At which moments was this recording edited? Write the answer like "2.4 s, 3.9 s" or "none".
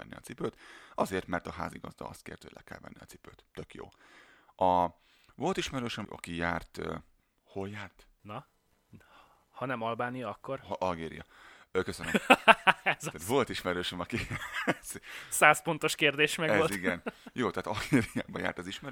6.0 s, 8.2 s